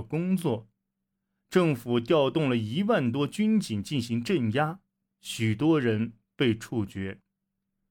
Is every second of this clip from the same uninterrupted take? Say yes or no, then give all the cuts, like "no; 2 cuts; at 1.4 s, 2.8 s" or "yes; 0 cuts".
yes; 0 cuts